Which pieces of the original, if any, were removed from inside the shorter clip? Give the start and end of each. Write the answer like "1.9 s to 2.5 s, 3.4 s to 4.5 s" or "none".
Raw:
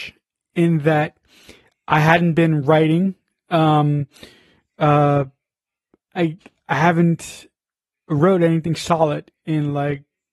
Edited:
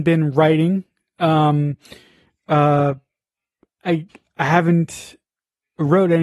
none